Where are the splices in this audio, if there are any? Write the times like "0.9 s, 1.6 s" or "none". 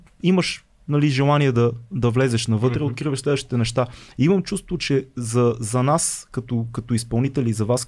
none